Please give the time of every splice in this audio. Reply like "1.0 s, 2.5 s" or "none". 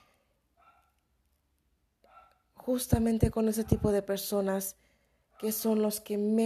none